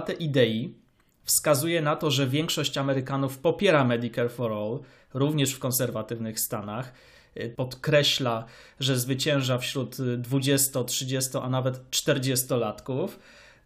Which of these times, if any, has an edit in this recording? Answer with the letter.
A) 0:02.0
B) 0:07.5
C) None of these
B